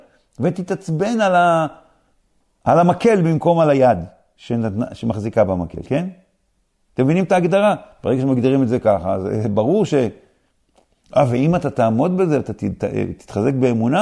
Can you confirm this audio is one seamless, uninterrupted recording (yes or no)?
yes